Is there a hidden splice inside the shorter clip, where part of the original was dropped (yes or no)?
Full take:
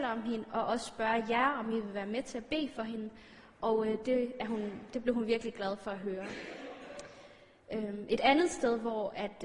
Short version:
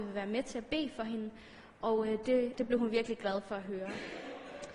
yes